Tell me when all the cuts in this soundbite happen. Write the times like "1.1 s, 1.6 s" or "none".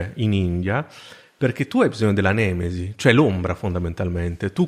none